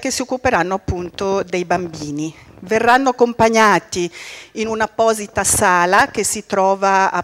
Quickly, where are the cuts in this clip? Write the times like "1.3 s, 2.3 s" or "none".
none